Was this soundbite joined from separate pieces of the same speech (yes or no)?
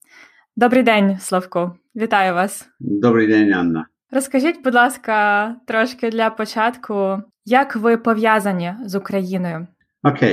no